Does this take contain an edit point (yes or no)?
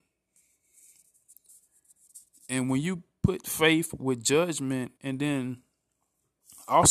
yes